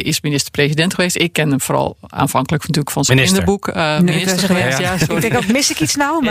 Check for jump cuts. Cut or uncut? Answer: uncut